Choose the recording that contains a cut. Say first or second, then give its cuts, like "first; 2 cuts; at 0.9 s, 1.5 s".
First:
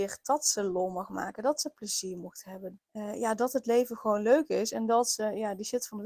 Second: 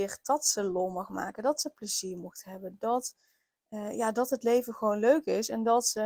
first; 1 cut; at 2.8 s